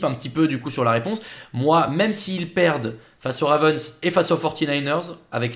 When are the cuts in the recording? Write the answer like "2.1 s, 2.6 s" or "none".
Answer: none